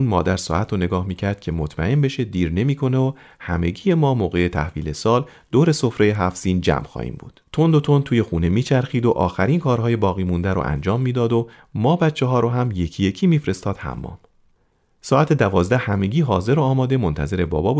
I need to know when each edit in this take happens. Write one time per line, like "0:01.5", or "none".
0:07.5